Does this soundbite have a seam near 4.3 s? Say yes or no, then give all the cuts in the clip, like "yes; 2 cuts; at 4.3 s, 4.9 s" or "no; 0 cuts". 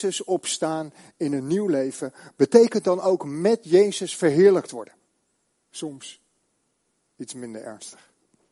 no; 1 cut; at 5.6 s